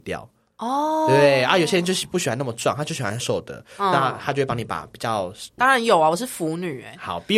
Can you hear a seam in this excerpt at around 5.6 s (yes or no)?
yes